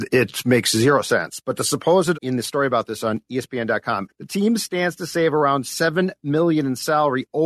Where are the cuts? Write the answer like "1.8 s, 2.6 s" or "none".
2.1 s, 4.1 s